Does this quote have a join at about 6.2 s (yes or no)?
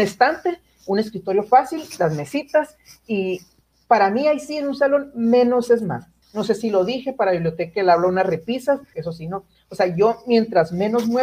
yes